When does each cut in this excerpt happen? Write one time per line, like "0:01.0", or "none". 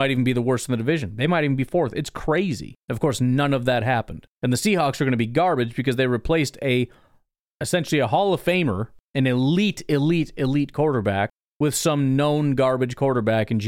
none